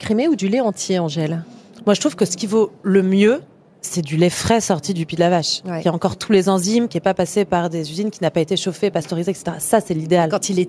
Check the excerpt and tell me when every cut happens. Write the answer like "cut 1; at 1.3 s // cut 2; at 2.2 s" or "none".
none

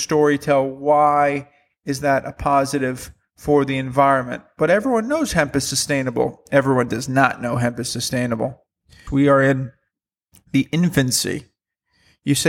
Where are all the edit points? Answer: cut 1; at 9.1 s

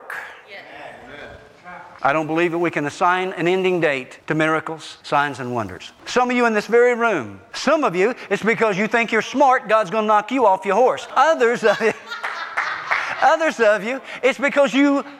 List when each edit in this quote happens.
cut 1; at 6.0 s // cut 2; at 9.2 s

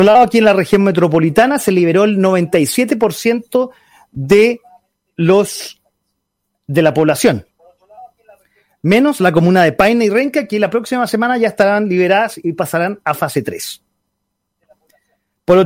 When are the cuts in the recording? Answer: none

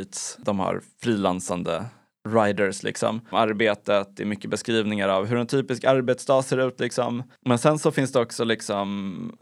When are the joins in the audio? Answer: cut 1; at 3.3 s

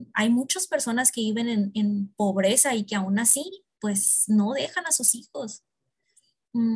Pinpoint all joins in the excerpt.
none

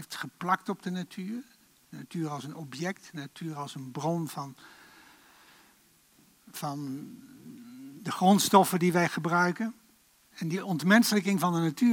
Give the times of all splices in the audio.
cut 1; at 10.2 s

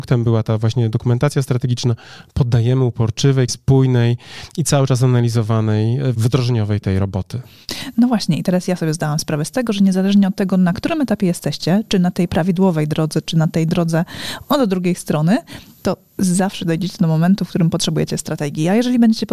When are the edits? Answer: cut 1; at 3.5 s

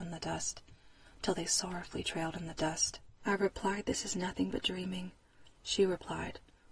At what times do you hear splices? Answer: cut 1; at 3.2 s // cut 2; at 5.5 s

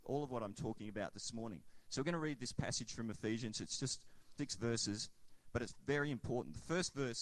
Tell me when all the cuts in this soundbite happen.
cut 1; at 4.4 s

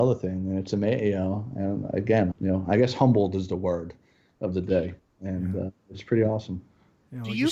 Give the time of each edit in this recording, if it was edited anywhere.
cut 1; at 2.3 s

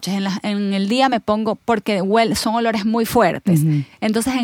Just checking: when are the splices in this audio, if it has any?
none

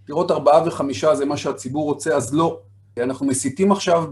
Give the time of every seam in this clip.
cut 1; at 3.0 s

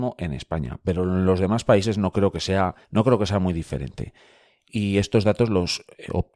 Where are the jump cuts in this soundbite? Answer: cut 1; at 2.8 s

